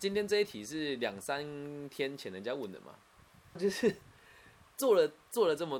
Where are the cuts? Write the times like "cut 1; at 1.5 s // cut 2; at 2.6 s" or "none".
cut 1; at 3.6 s